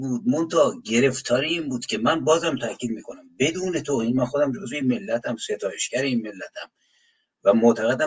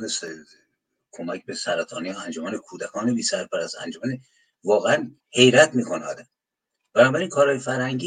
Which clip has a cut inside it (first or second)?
second